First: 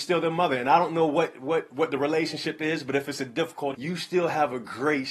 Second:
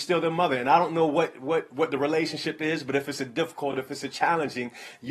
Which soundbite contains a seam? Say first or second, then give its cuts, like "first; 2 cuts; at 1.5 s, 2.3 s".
first; 1 cut; at 3.7 s